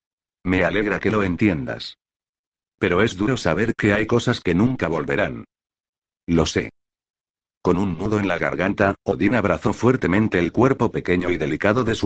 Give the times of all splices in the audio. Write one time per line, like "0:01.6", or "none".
none